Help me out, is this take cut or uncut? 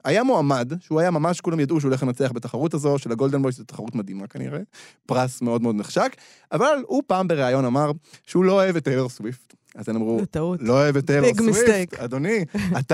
uncut